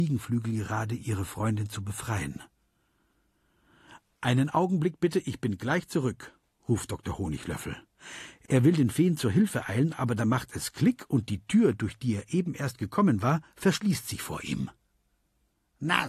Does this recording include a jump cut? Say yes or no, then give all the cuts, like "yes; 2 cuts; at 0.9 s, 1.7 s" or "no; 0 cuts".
no; 0 cuts